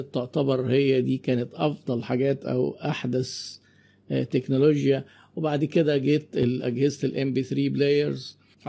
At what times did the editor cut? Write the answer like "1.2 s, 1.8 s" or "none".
none